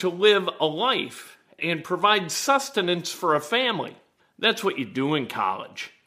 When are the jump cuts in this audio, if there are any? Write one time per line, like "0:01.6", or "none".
0:01.6
0:04.2